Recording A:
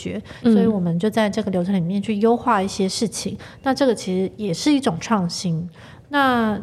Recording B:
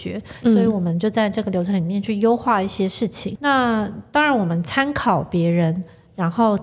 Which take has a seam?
B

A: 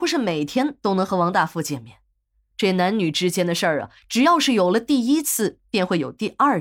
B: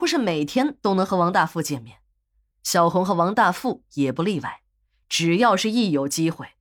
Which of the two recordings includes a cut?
B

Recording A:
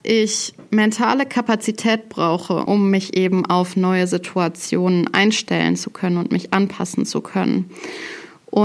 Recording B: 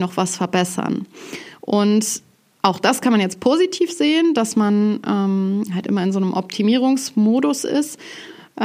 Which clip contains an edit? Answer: A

